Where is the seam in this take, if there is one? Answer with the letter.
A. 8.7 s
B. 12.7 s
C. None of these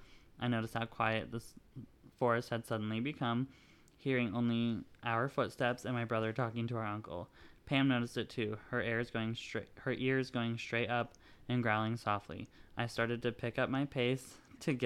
C